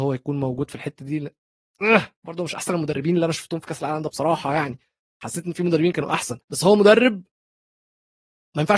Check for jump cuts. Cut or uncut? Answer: cut